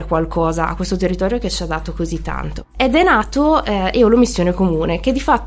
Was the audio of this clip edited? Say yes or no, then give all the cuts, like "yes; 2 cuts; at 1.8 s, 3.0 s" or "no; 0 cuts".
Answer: no; 0 cuts